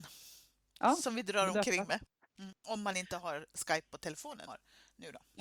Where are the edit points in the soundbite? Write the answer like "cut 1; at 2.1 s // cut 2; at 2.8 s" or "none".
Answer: cut 1; at 2.3 s // cut 2; at 4.5 s